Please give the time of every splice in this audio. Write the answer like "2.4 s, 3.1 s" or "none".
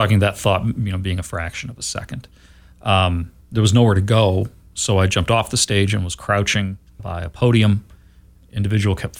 7.0 s